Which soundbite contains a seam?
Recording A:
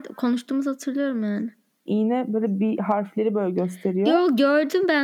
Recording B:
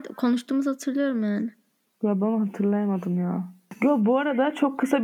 A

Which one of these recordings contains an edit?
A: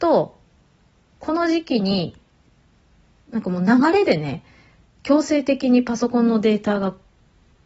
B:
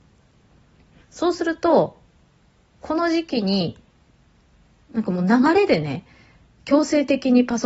B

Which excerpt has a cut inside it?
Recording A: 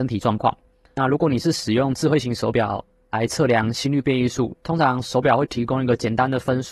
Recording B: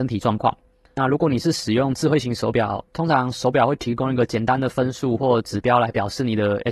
B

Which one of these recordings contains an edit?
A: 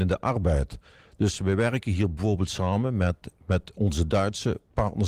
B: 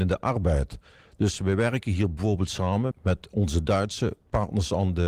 B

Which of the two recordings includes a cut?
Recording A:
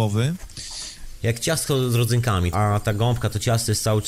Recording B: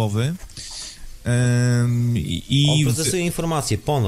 A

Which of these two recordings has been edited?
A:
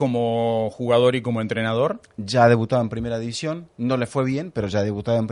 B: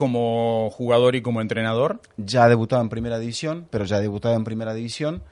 B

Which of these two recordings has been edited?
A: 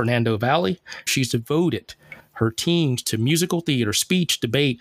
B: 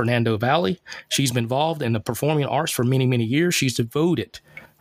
A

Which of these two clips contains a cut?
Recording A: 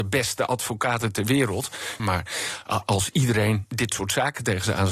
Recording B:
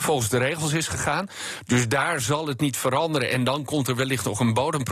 A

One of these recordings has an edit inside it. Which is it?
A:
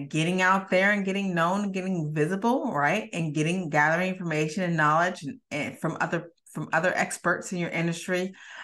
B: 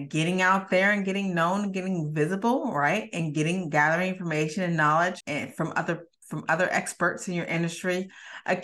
B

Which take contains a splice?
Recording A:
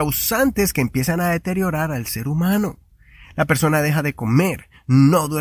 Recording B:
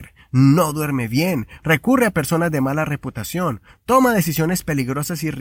B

